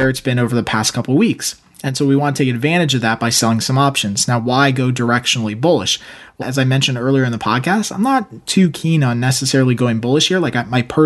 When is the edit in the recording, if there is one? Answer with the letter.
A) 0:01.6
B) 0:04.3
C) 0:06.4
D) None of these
C